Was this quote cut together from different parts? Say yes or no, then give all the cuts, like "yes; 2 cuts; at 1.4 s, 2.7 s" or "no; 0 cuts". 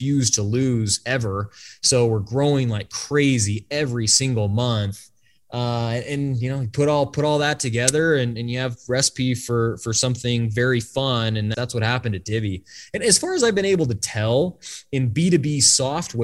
yes; 1 cut; at 11.5 s